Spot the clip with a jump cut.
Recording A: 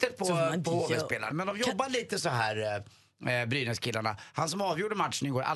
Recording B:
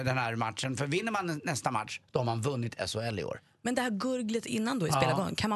A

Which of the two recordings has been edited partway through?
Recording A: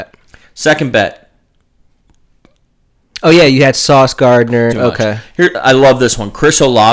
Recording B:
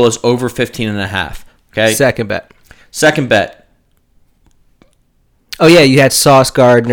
A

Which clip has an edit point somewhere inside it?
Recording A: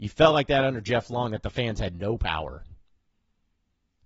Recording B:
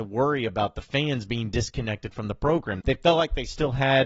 B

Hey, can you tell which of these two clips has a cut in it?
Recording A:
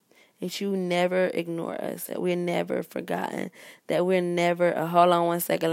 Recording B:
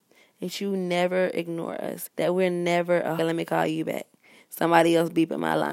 B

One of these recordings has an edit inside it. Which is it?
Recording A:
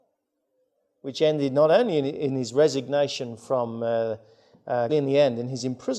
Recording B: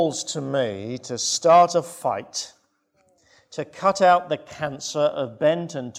A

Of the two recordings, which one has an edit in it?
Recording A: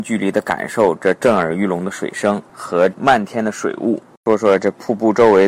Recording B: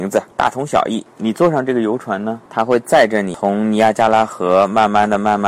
A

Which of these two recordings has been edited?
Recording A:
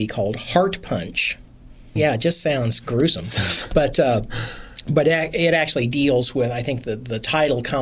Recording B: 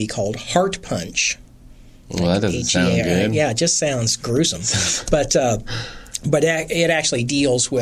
A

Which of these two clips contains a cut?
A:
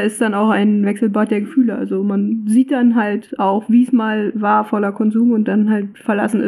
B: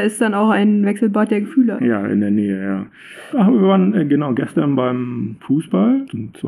B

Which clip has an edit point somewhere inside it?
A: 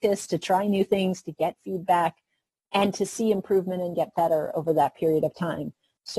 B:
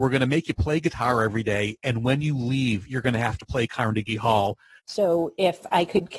B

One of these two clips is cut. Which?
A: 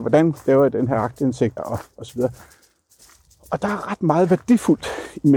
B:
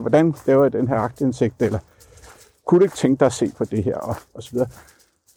A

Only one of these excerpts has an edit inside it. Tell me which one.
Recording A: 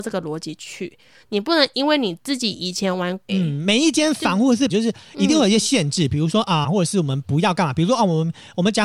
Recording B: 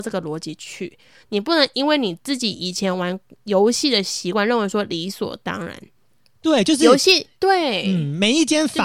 A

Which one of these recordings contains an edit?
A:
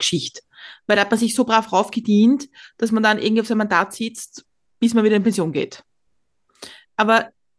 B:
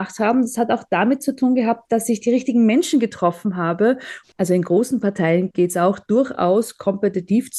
B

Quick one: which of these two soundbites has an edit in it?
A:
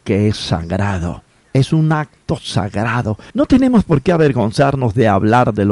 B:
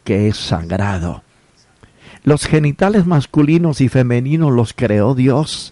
A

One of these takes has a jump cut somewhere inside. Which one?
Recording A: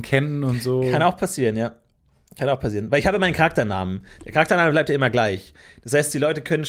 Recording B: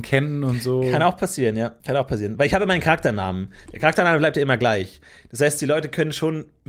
B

